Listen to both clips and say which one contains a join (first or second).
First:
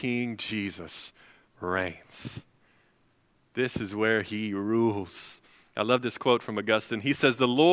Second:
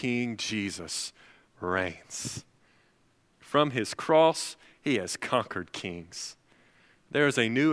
second